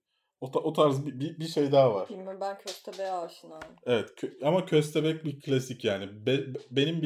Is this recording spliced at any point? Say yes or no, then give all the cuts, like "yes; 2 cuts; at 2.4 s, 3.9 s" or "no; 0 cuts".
no; 0 cuts